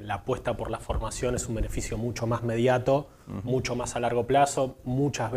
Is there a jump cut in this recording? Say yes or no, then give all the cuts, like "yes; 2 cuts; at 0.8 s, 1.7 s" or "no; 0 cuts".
no; 0 cuts